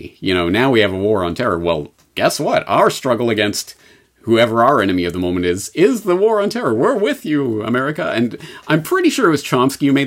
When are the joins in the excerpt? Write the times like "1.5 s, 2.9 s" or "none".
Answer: none